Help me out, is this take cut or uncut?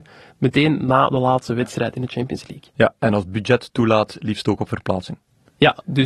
uncut